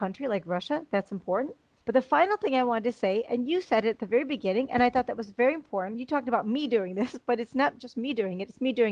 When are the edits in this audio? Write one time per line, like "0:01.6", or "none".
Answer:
none